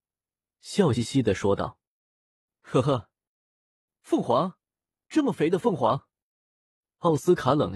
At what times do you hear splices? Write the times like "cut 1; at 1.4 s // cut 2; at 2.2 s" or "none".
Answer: cut 1; at 0.9 s

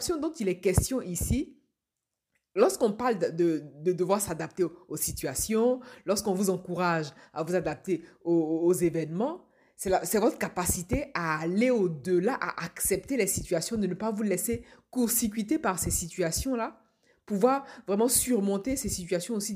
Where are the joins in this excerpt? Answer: none

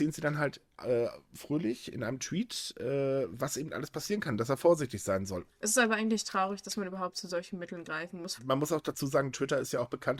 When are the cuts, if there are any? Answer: cut 1; at 5.5 s // cut 2; at 8.4 s

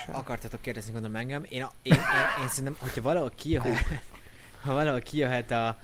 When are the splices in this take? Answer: none

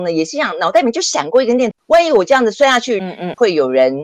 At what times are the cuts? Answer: cut 1; at 1.7 s // cut 2; at 3.0 s

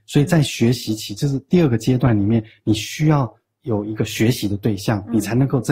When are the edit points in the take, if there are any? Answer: none

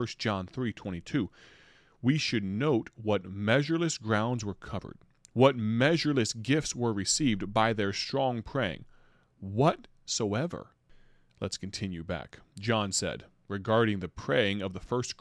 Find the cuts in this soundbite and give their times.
cut 1; at 11.3 s

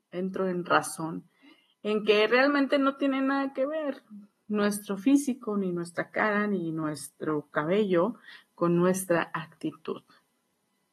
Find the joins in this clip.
none

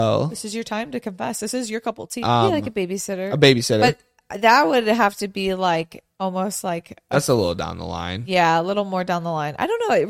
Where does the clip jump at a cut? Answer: cut 1; at 2.2 s

